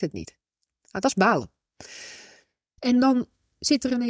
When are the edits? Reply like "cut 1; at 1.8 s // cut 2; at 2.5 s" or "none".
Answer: cut 1; at 2.8 s